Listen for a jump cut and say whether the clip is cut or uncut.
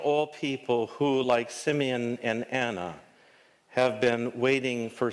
uncut